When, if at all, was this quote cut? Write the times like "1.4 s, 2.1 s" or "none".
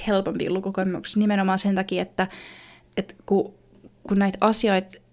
none

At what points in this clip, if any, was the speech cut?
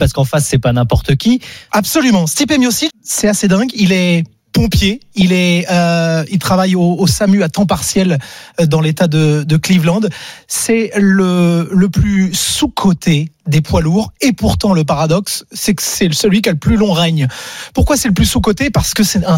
1.7 s, 2.9 s

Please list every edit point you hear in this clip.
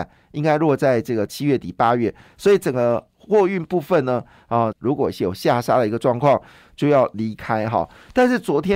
4.7 s

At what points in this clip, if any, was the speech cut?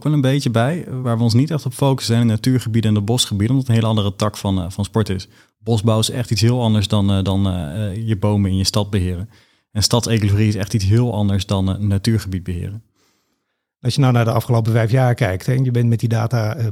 none

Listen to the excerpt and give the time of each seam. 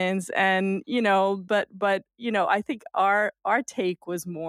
none

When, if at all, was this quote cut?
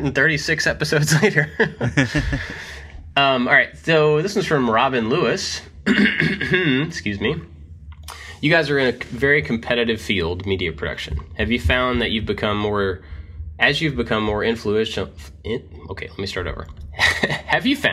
none

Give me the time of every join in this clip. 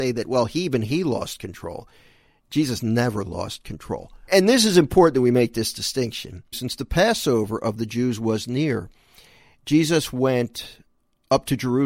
4.3 s, 6.5 s

